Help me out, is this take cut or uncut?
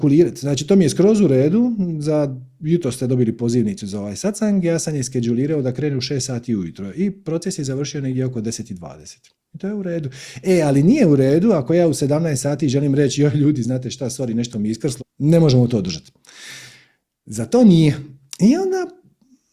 cut